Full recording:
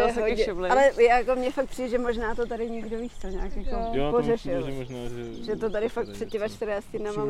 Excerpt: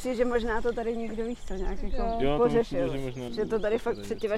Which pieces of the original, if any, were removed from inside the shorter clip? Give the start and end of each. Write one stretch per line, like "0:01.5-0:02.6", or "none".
0:05.0-0:05.4